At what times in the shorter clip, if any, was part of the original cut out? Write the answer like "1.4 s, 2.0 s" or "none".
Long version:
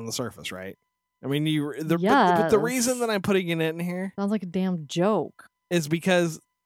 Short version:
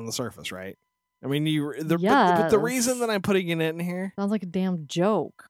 none